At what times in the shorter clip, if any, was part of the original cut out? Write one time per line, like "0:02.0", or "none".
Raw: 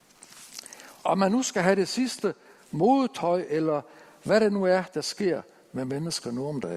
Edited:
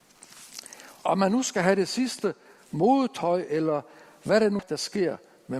0:04.6